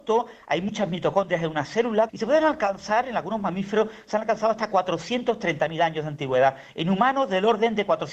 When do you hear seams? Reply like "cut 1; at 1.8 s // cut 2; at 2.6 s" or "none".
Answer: cut 1; at 2.1 s